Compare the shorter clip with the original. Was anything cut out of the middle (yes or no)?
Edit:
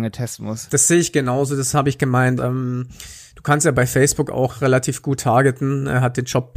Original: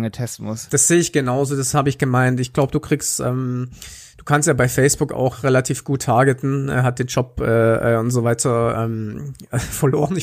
yes